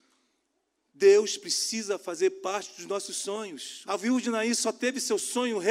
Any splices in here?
yes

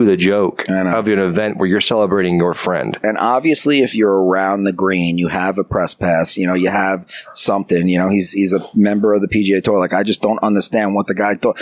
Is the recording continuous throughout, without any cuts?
yes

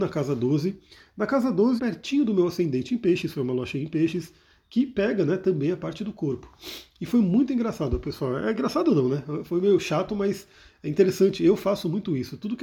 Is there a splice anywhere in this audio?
yes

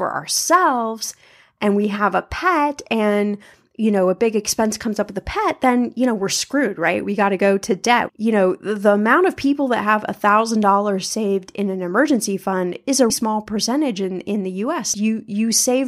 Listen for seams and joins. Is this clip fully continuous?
no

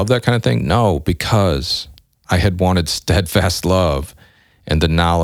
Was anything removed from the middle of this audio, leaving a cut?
no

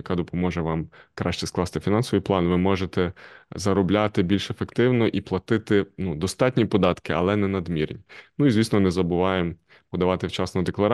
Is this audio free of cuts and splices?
yes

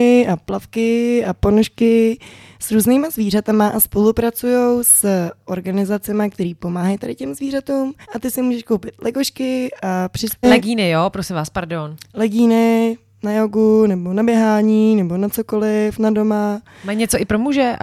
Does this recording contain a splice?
yes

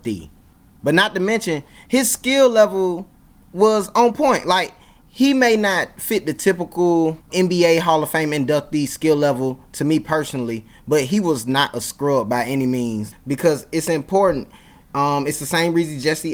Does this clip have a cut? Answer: yes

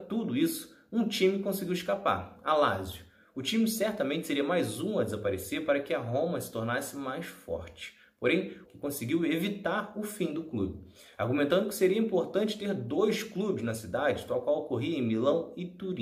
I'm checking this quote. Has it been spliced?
yes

